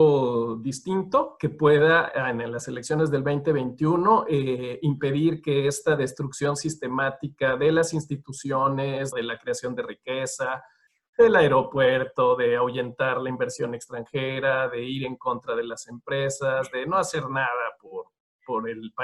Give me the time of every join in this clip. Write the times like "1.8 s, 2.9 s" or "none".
9.1 s

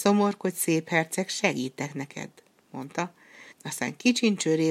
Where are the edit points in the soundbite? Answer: 3.5 s

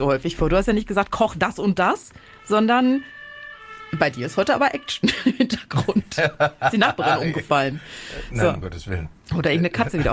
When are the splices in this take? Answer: none

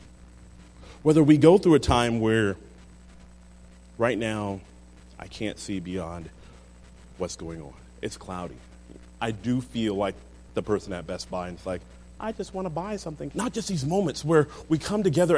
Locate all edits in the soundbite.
9.2 s, 13.3 s

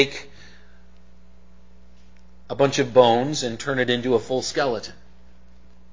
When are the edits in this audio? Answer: 2.4 s

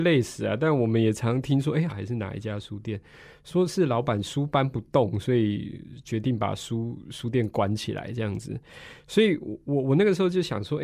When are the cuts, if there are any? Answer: 1.9 s

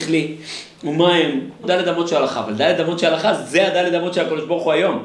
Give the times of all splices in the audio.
1.6 s

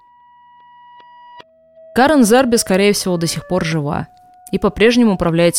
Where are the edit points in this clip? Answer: none

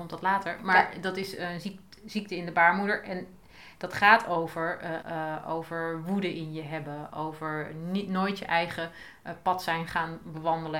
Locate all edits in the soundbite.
5.0 s

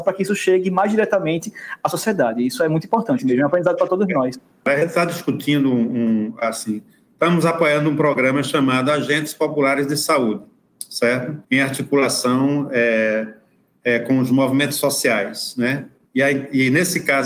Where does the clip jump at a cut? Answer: 11.4 s, 16.1 s

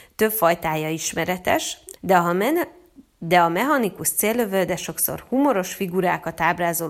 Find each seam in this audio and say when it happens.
2.0 s

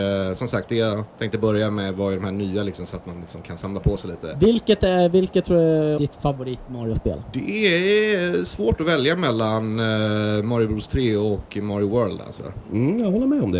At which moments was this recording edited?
6.0 s

